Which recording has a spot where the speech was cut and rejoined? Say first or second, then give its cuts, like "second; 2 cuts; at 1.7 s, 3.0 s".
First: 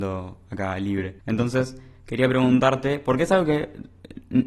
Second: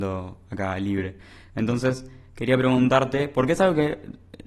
first; 1 cut; at 1.2 s